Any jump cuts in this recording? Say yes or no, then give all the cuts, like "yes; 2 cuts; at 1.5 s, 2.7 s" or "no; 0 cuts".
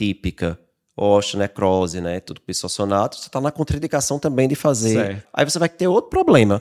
yes; 1 cut; at 5.3 s